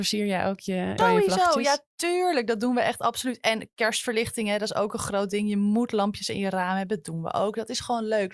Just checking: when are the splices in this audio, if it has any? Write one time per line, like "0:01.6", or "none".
0:01.0